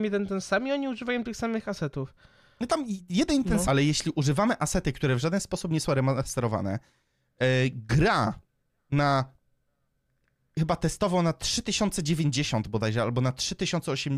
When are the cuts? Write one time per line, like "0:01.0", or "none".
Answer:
0:03.6